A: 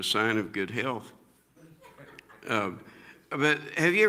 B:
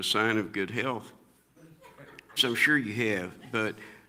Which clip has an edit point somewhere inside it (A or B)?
B